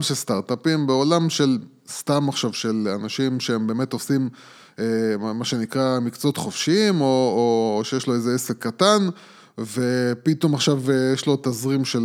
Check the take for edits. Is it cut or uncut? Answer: uncut